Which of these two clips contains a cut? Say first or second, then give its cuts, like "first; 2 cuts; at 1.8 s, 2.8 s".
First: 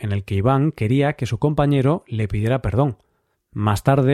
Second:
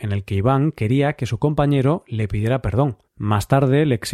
second; 1 cut; at 3.1 s